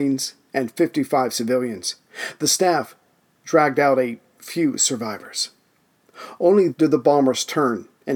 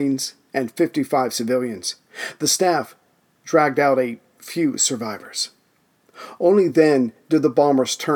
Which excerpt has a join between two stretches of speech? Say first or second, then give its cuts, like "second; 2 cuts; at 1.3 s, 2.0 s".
first; 1 cut; at 6.7 s